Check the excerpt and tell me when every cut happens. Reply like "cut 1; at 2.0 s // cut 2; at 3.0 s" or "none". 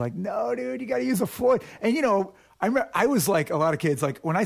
none